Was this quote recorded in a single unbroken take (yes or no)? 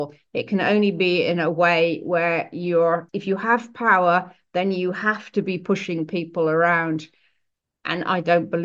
yes